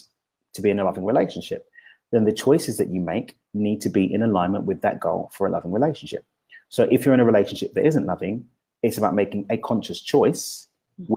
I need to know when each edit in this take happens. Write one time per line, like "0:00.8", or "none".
none